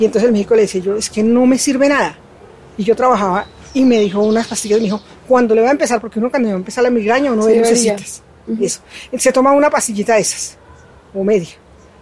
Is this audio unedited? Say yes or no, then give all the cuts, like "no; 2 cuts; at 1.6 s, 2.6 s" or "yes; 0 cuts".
yes; 0 cuts